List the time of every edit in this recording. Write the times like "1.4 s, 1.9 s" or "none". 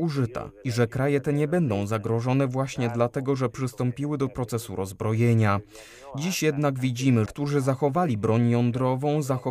7.3 s